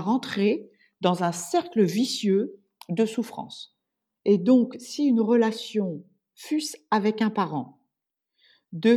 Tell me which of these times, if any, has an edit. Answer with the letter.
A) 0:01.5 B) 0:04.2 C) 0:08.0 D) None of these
B